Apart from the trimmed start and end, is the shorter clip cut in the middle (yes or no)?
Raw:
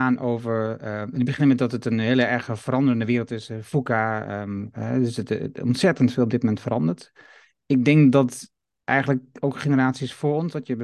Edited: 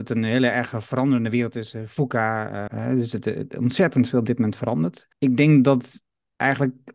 yes